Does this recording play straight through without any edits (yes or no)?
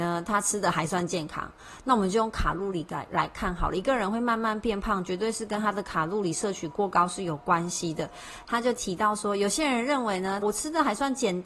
no